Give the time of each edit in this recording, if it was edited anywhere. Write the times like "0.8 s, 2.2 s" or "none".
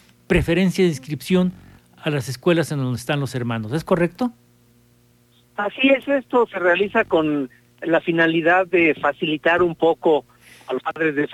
none